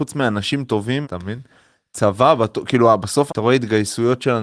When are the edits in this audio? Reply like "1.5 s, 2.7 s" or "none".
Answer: 1.0 s, 3.3 s